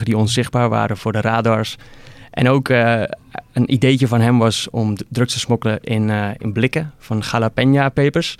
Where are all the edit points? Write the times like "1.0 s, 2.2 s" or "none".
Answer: 1.0 s